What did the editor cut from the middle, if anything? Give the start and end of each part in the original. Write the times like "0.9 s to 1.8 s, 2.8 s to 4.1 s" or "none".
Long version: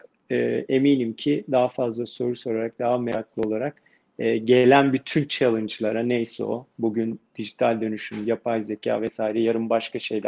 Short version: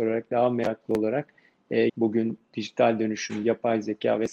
4.4 s to 6.7 s